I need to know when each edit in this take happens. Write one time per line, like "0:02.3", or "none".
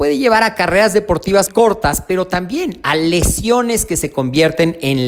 0:01.5